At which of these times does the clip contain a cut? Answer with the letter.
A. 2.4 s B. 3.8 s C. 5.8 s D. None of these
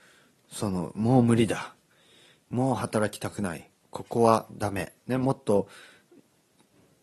D